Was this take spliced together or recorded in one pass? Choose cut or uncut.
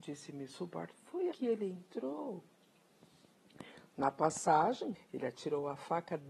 cut